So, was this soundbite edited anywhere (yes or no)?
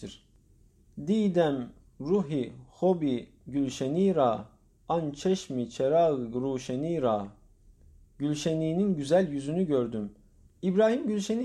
yes